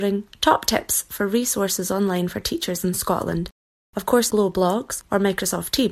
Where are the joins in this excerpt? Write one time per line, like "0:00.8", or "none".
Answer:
0:04.3